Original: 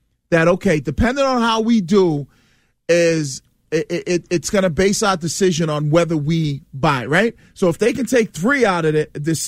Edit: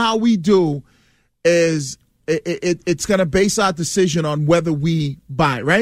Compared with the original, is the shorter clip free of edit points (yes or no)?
yes